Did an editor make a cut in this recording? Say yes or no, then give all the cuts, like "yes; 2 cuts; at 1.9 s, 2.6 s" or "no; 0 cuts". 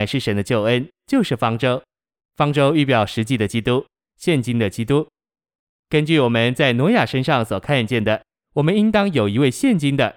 no; 0 cuts